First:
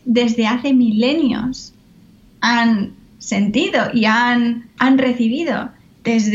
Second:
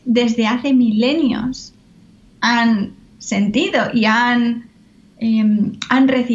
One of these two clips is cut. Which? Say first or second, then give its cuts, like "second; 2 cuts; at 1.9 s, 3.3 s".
first; 1 cut; at 4.8 s